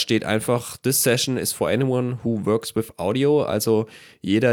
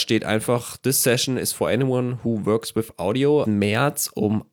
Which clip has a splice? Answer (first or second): second